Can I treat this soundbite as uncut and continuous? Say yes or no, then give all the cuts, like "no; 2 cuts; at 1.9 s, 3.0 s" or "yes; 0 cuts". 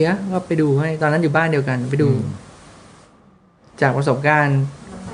yes; 0 cuts